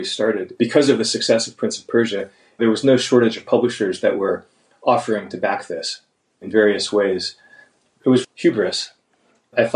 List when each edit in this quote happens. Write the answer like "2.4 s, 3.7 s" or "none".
8.2 s